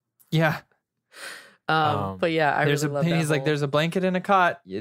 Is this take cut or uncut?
uncut